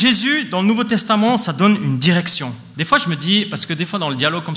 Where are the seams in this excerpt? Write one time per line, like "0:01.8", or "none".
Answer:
0:02.7